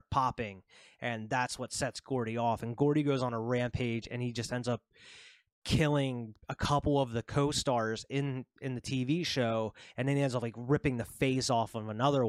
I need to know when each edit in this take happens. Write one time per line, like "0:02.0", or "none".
0:06.4